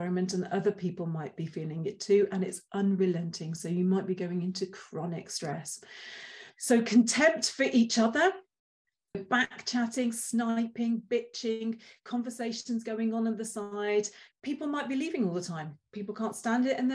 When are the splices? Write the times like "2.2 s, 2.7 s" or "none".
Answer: 9.1 s